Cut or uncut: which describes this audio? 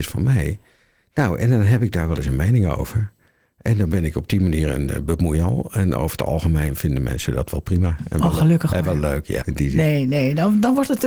cut